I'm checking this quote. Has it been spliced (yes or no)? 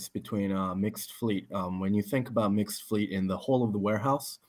no